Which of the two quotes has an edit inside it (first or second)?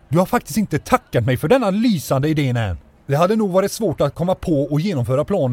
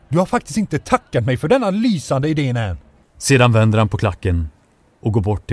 second